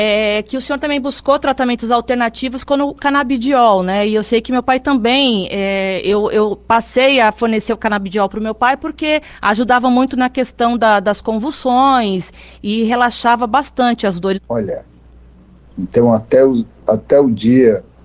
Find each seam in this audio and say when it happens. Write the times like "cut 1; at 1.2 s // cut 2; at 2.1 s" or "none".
cut 1; at 3.0 s // cut 2; at 14.3 s